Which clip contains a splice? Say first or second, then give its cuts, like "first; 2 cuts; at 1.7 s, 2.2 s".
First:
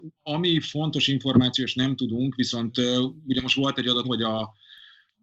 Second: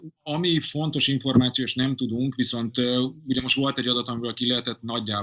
first; 1 cut; at 4.0 s